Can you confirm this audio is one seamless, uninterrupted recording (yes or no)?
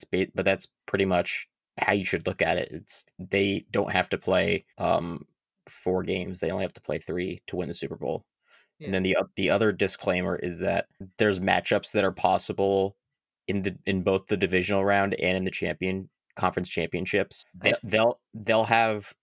no